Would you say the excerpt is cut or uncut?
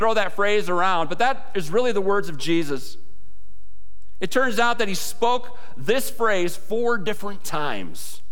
uncut